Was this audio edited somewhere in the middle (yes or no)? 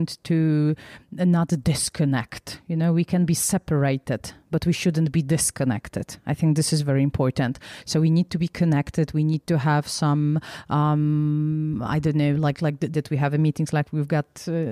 yes